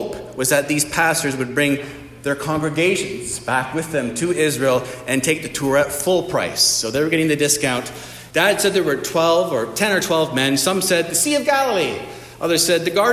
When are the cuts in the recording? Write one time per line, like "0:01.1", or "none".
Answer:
0:08.3